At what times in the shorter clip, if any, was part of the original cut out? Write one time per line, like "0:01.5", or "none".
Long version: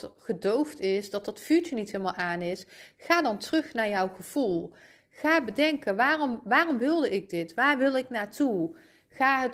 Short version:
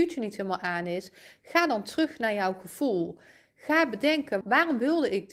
0:04.4

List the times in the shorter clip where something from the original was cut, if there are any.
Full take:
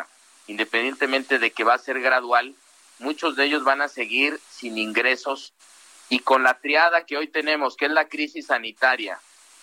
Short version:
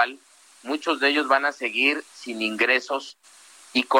none

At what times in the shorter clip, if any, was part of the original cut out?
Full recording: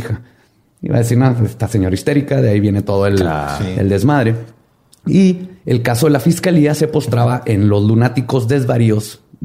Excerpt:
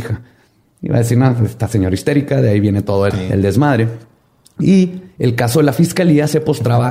0:03.1

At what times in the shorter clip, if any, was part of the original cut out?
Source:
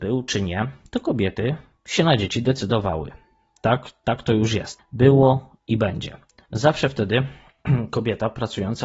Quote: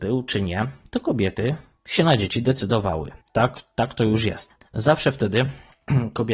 0:03.2
0:04.6

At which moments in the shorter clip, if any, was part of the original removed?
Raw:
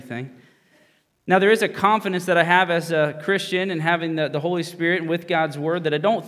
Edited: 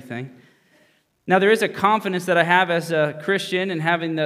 none

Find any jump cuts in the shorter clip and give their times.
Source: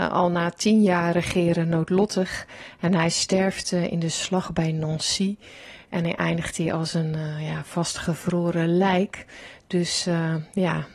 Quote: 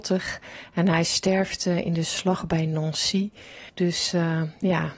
0:03.7

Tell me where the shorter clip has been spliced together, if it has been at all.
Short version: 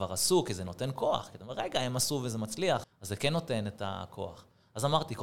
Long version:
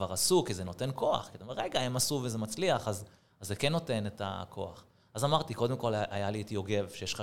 0:02.8

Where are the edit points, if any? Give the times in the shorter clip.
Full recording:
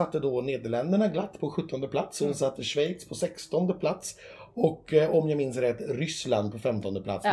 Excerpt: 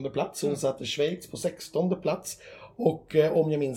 none

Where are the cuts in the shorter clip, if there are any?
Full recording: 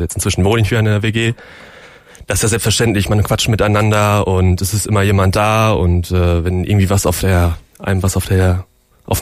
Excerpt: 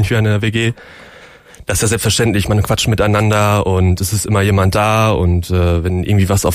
none

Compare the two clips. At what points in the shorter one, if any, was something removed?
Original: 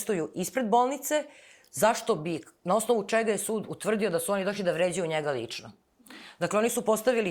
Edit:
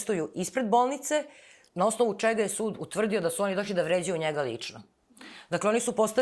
0:01.7

